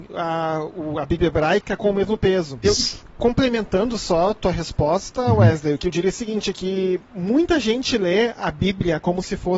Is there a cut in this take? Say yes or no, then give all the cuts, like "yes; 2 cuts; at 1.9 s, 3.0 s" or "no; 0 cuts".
yes; 1 cut; at 2.6 s